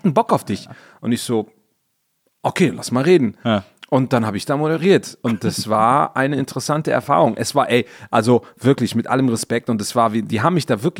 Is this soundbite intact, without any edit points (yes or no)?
yes